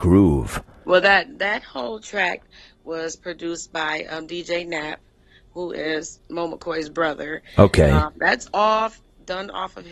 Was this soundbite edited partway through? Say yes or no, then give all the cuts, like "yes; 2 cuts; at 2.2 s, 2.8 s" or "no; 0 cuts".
no; 0 cuts